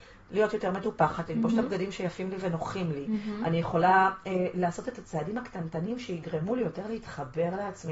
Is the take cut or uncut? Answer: uncut